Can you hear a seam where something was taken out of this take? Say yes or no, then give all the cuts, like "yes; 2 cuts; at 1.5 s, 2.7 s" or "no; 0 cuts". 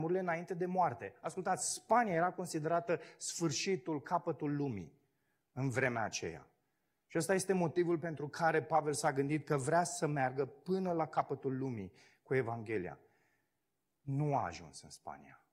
no; 0 cuts